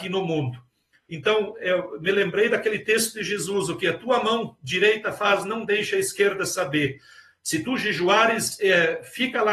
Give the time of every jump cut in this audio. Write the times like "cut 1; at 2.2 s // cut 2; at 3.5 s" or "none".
cut 1; at 1.1 s

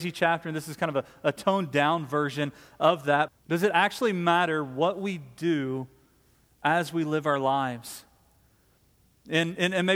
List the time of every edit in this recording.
cut 1; at 3.3 s

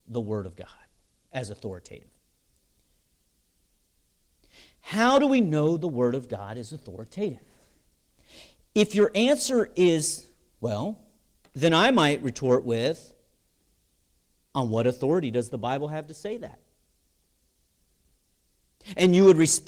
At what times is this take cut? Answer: cut 1; at 11.4 s

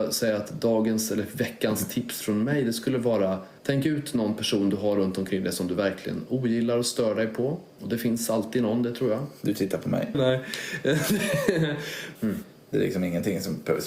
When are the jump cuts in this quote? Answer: cut 1; at 3.6 s // cut 2; at 10.1 s // cut 3; at 12.2 s

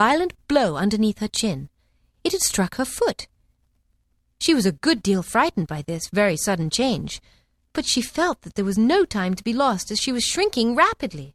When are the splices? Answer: none

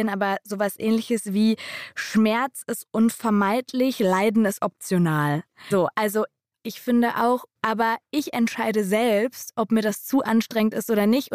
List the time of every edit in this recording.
cut 1; at 5.7 s // cut 2; at 7.5 s

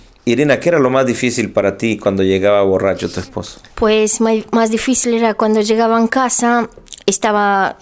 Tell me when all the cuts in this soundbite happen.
cut 1; at 3.7 s

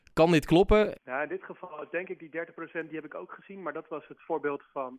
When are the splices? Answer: cut 1; at 1.0 s

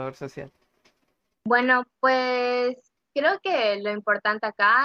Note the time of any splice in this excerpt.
none

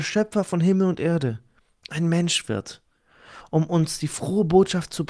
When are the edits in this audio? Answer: none

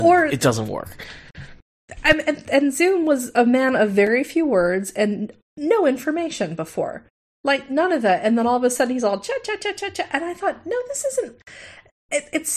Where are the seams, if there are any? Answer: cut 1; at 2.4 s

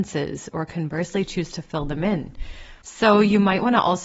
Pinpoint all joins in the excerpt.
cut 1; at 2.8 s

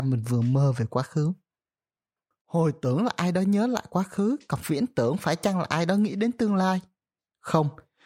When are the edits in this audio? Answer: cut 1; at 2.3 s

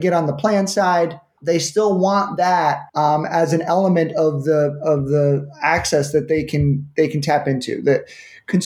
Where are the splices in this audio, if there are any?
cut 1; at 1.4 s // cut 2; at 2.9 s

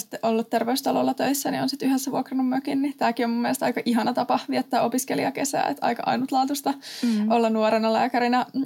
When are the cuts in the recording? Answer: none

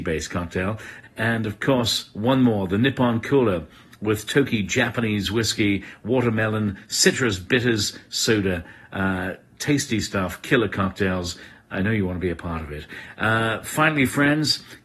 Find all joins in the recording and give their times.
cut 1; at 1.0 s

